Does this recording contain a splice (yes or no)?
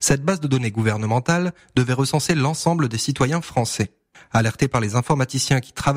no